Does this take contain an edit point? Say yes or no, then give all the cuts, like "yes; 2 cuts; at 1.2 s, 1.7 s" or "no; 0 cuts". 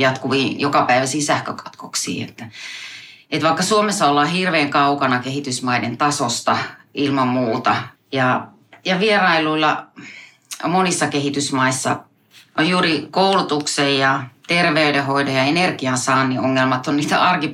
yes; 1 cut; at 7.9 s